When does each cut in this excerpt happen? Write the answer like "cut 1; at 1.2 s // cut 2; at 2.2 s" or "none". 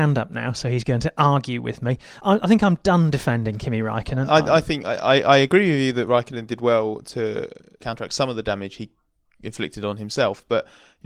none